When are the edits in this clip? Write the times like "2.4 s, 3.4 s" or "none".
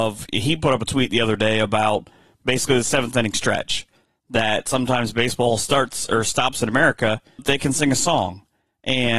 7.4 s